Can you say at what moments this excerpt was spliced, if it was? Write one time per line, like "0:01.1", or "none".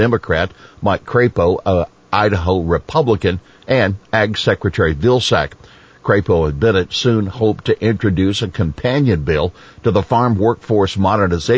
none